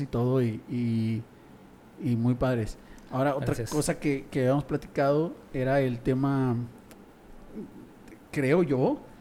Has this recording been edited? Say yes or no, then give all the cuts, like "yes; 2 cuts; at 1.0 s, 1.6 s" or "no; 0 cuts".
no; 0 cuts